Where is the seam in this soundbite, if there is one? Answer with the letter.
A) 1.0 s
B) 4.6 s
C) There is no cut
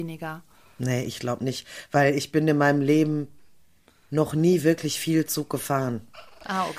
C